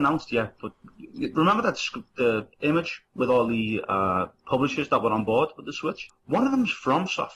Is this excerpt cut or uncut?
cut